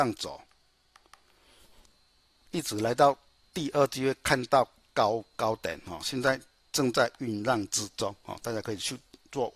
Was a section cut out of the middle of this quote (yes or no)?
no